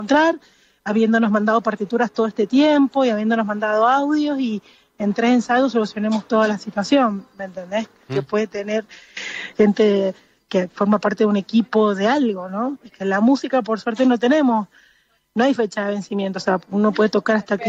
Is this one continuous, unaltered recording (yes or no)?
no